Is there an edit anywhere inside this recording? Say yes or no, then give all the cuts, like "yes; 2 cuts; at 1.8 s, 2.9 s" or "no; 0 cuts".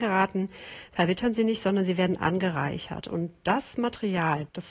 no; 0 cuts